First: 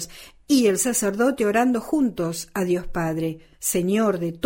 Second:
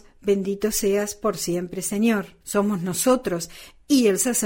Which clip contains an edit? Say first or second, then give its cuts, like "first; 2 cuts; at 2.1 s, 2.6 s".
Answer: second; 1 cut; at 2.4 s